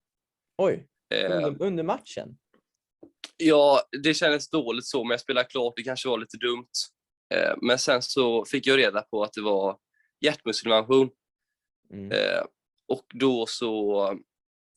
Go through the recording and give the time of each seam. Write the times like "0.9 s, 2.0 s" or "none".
none

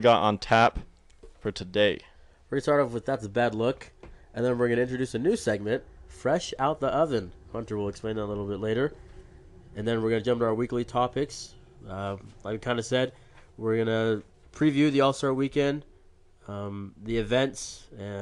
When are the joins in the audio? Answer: none

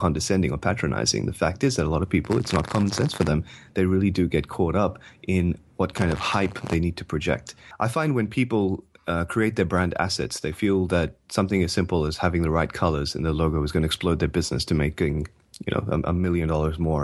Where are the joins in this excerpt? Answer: none

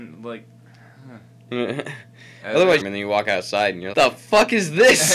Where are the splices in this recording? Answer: 2.8 s, 3.9 s

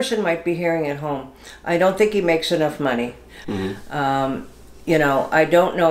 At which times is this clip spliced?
3.4 s

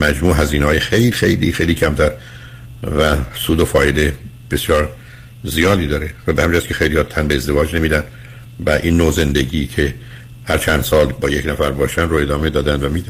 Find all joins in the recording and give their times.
1.1 s

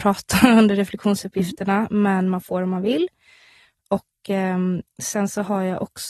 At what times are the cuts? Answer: none

